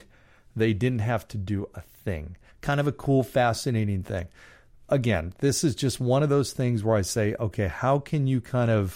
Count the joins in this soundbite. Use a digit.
1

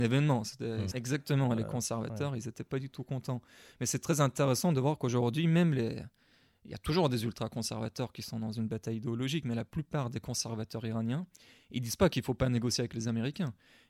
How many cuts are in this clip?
1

